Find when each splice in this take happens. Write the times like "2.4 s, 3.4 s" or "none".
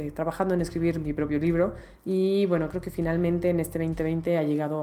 none